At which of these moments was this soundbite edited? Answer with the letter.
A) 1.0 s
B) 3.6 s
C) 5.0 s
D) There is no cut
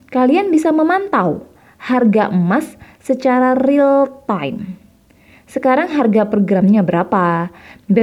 D